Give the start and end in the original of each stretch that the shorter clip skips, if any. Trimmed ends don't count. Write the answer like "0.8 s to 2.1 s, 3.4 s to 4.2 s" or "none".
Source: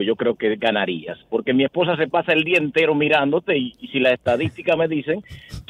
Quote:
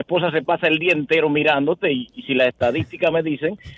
none